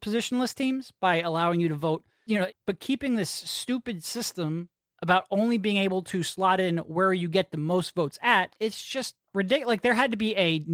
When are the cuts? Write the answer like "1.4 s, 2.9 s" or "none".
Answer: 2.5 s, 9.2 s